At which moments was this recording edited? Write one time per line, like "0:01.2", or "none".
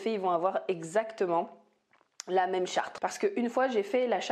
0:03.0